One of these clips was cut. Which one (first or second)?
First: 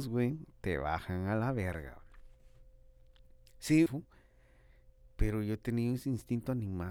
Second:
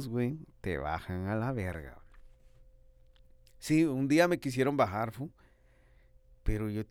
first